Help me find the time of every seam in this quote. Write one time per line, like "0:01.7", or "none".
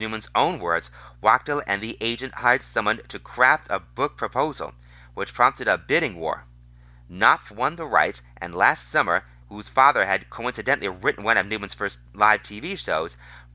0:09.4